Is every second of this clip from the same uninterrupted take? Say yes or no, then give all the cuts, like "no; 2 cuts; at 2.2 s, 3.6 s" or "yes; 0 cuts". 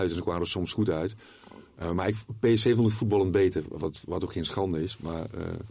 yes; 0 cuts